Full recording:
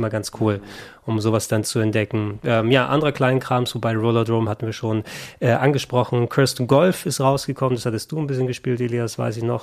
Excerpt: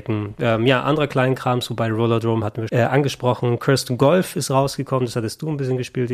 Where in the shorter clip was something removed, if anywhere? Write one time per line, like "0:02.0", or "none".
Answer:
0:02.7